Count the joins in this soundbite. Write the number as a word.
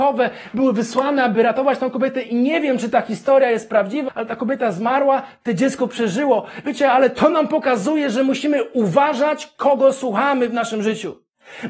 one